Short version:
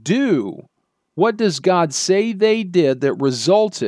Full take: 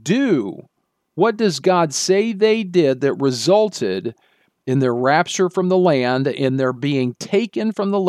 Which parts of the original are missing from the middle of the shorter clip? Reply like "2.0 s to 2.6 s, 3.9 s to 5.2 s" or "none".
none